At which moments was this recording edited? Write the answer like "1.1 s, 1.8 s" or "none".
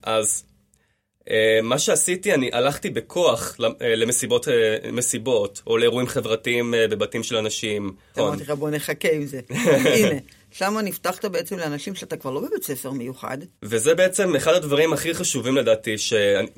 8.1 s, 13.5 s